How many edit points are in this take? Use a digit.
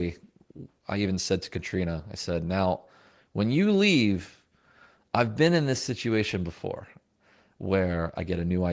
0